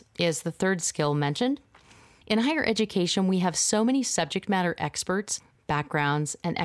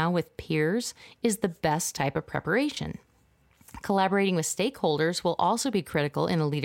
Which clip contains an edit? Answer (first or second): first